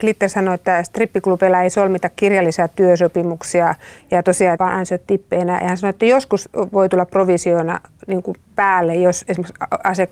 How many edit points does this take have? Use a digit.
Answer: 1